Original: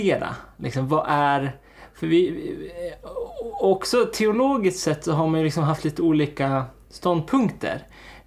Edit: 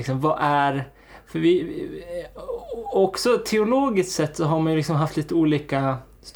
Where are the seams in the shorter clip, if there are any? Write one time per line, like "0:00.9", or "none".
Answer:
none